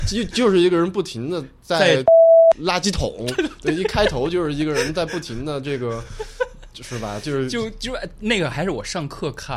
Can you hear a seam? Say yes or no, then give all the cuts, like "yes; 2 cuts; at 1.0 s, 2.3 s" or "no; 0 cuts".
no; 0 cuts